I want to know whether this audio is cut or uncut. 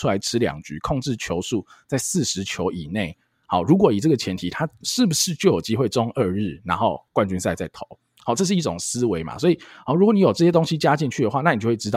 uncut